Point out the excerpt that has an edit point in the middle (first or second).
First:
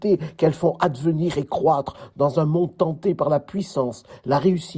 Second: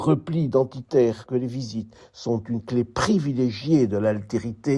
second